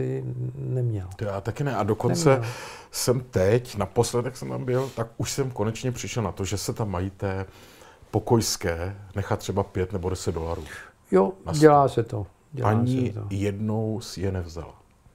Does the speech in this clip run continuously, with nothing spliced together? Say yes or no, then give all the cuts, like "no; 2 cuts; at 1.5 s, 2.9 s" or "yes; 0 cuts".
yes; 0 cuts